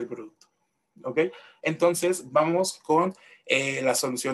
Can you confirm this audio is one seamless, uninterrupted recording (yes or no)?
yes